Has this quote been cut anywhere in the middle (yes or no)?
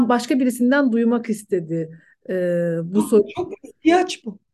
no